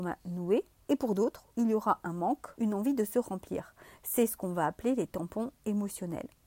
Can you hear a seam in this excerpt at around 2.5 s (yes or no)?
yes